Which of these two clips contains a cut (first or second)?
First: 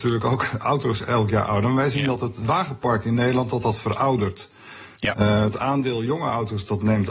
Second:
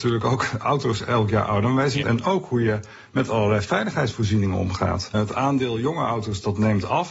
second